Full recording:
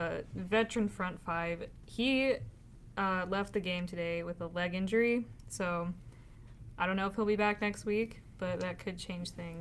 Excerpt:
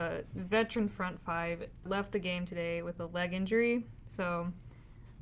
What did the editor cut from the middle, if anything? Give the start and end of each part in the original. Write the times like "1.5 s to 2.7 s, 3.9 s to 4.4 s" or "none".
1.9 s to 3.3 s